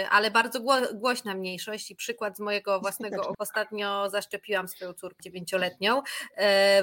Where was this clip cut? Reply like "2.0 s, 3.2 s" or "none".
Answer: 3.3 s, 5.2 s